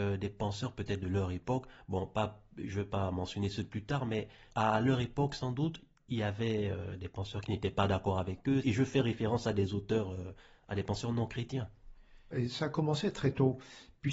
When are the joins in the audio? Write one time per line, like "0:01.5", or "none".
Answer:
0:08.6
0:12.3